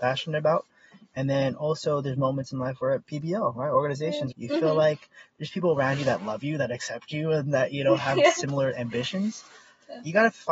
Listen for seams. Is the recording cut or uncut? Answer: cut